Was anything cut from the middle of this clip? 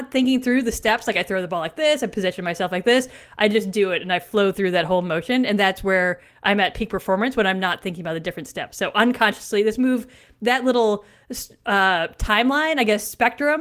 no; 0 cuts

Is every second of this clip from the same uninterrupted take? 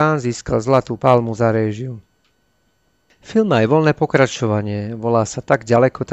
yes; 0 cuts

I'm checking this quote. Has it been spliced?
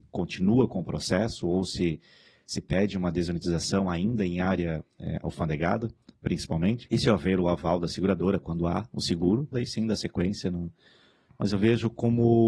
yes; 2 cuts; at 6.8 s, 9.5 s

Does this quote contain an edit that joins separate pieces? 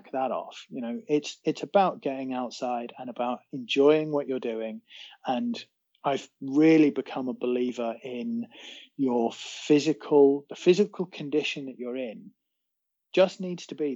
no; 0 cuts

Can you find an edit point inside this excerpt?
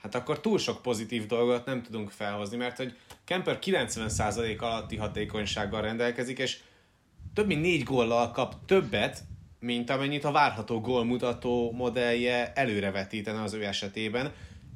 no; 0 cuts

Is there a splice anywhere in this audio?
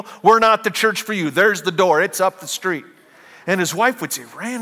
no; 0 cuts

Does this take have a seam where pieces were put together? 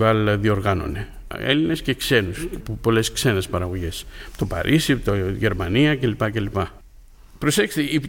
no; 0 cuts

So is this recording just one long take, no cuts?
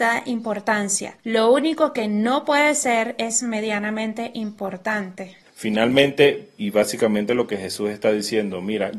no; 2 cuts; at 5.4 s, 6.6 s

